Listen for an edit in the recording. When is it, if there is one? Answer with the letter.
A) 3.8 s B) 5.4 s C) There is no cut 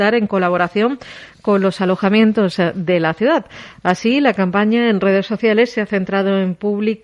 C